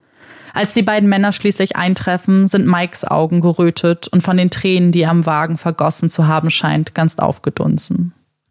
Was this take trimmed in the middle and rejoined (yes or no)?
no